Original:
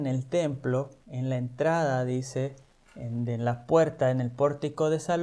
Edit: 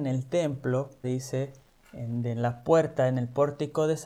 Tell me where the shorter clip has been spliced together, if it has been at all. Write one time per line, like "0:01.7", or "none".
0:01.0